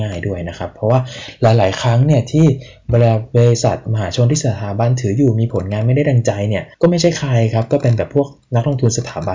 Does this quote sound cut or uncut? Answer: cut